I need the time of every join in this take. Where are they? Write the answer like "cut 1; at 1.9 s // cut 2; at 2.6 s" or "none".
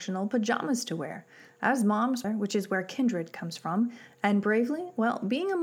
cut 1; at 2.2 s